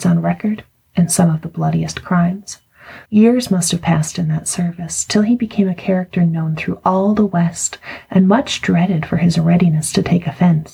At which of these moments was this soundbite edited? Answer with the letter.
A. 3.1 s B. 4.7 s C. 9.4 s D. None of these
A